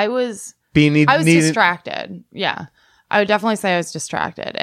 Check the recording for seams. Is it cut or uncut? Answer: uncut